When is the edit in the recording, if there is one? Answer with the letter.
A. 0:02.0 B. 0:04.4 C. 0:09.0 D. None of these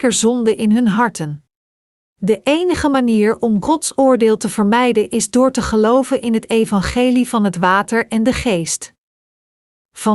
A